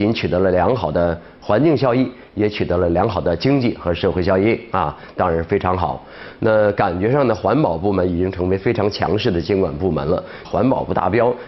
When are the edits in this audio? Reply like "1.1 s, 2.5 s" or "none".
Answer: 10.4 s